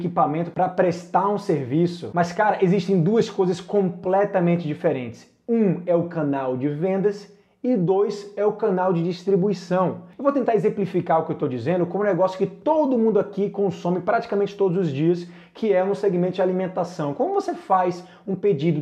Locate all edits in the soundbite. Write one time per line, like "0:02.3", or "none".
none